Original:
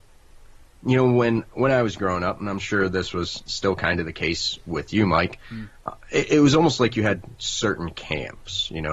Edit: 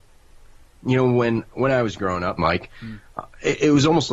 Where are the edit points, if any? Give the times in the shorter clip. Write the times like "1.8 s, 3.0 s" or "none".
2.4 s